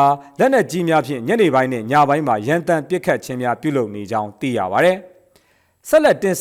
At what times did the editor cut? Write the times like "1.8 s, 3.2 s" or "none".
none